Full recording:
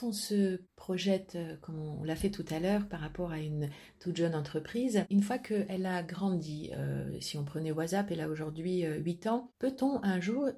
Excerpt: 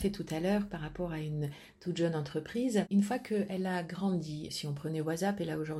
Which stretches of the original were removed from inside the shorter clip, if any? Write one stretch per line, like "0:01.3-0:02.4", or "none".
0:06.7-0:07.2